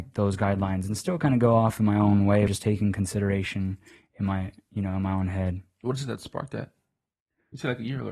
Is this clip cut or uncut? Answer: cut